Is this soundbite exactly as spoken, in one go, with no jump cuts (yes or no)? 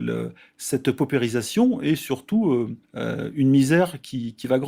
no